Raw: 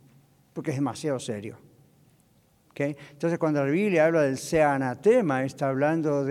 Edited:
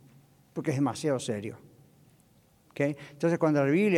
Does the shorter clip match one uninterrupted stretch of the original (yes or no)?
yes